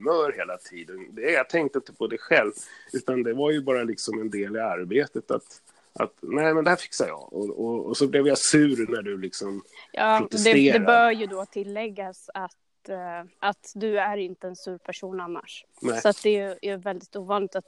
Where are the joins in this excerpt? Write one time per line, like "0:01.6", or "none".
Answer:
0:13.3
0:15.7